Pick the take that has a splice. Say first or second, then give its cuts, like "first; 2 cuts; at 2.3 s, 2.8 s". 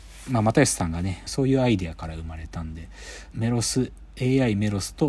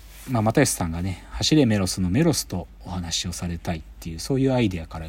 first; 2 cuts; at 1.3 s, 3.3 s